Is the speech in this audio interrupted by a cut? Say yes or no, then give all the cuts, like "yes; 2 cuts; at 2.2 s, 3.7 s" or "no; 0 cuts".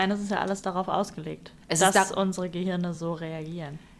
no; 0 cuts